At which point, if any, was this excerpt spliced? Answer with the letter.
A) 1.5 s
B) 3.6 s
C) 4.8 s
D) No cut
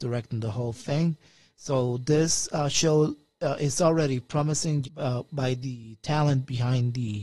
C